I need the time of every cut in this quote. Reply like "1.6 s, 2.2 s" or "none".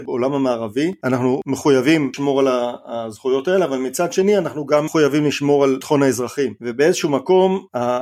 none